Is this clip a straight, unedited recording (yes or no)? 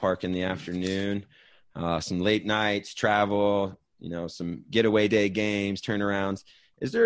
yes